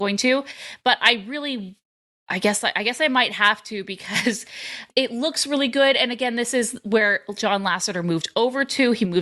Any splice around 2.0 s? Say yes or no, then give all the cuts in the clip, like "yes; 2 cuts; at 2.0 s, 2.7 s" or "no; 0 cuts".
no; 0 cuts